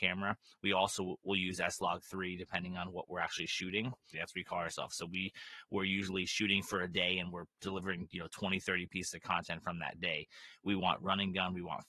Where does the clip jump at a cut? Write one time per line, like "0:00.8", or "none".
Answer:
0:04.1